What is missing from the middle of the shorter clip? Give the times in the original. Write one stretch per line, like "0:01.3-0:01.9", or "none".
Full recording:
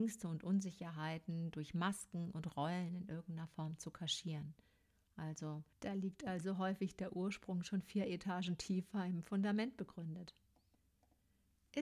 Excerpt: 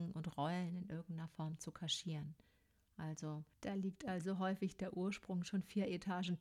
none